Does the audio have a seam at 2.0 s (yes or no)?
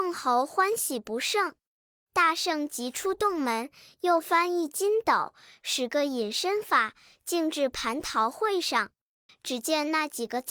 no